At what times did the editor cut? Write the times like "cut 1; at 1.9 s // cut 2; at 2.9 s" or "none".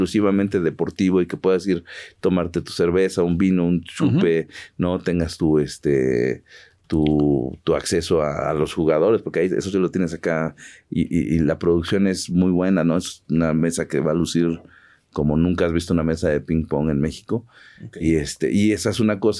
none